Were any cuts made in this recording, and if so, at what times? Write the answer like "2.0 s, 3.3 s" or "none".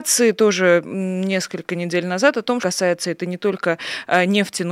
2.6 s